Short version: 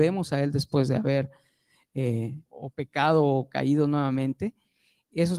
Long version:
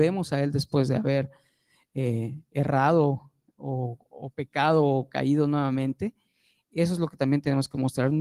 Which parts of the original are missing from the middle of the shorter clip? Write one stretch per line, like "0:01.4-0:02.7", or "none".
0:02.5-0:04.1